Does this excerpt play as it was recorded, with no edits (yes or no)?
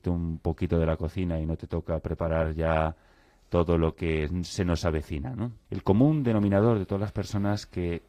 no